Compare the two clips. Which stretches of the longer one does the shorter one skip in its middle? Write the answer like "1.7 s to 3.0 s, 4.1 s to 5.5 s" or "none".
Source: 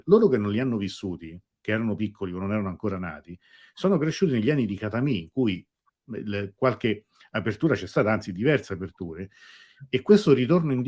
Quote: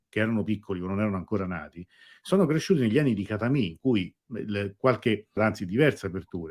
5.7 s to 6.0 s, 7.1 s to 8.0 s